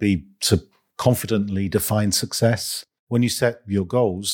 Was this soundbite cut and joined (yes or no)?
yes